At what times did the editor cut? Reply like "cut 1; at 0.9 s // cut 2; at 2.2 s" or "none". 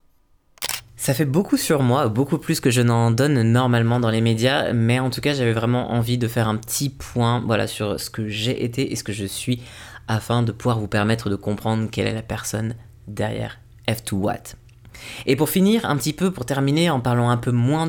none